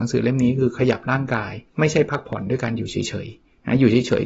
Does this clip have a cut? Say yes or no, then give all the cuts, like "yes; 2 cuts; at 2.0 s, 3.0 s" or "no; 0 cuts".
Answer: yes; 1 cut; at 1.7 s